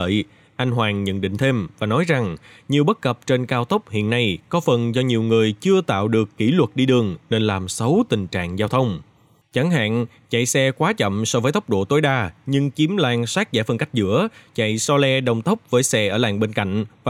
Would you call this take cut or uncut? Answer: cut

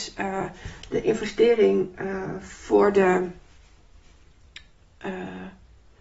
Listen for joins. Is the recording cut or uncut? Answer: uncut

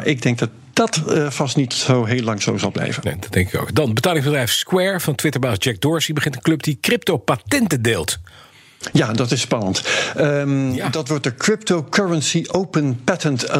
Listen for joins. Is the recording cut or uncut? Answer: uncut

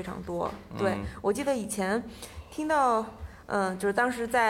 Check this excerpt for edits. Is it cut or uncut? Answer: uncut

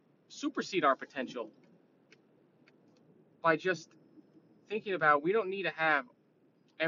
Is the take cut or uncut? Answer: uncut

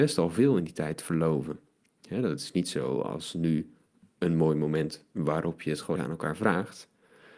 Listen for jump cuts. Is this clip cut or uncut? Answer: cut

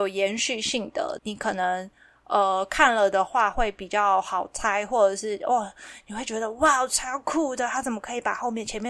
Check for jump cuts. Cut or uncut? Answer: cut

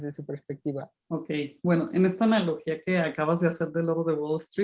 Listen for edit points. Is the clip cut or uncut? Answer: cut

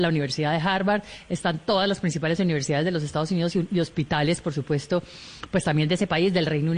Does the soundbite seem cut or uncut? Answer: uncut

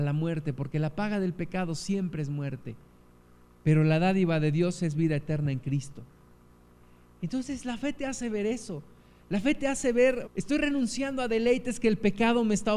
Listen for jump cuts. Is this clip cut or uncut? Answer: cut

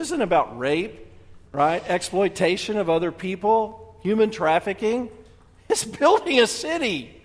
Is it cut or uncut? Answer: cut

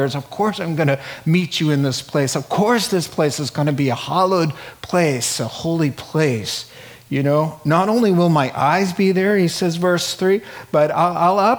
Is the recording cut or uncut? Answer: uncut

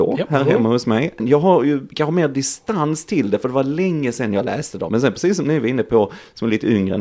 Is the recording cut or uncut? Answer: cut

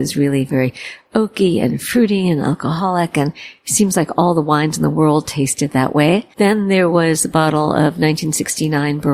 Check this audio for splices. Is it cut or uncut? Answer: cut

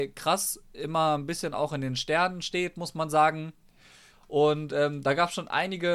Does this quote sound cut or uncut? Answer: cut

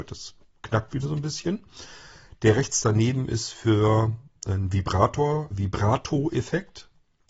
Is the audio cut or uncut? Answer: cut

